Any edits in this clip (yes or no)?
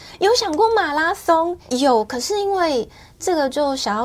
yes